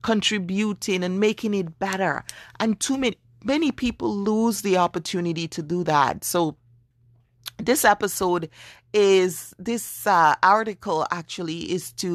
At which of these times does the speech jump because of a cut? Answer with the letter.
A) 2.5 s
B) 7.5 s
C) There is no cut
C